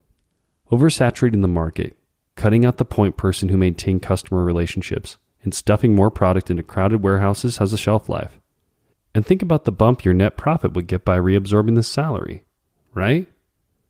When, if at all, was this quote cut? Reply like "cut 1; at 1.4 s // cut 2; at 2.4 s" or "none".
cut 1; at 8.9 s